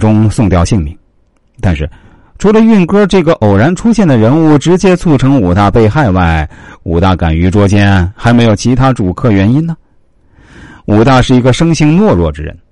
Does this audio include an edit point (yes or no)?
no